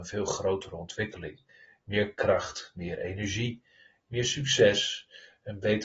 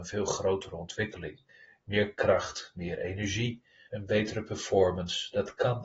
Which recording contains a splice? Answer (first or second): second